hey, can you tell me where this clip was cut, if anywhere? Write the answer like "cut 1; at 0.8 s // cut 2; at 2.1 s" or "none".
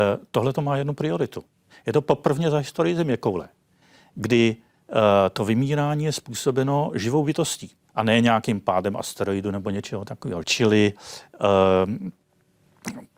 cut 1; at 10.4 s